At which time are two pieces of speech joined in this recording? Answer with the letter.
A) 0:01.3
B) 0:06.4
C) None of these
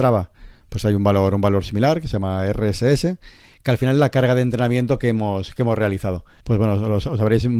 B